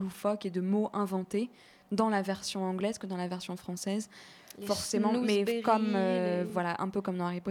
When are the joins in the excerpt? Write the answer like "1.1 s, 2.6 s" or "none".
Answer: none